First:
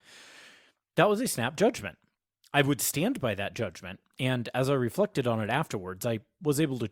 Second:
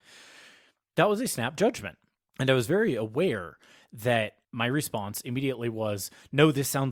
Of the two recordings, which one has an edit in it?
second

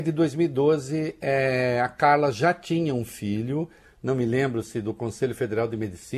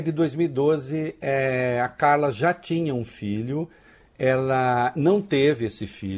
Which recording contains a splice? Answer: first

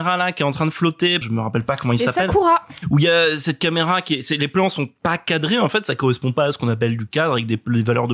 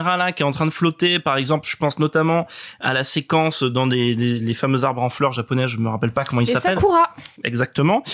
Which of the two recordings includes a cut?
first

